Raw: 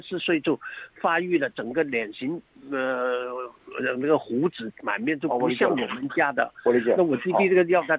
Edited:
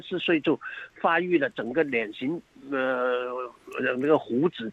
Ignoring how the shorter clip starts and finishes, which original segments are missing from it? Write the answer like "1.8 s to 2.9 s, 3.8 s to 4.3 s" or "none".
none